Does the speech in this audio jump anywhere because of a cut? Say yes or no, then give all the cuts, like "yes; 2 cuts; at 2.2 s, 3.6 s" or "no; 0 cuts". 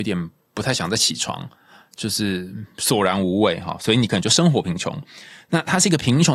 no; 0 cuts